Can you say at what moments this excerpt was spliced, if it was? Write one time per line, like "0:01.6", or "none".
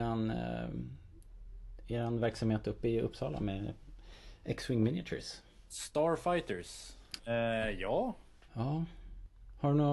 0:07.2
0:08.5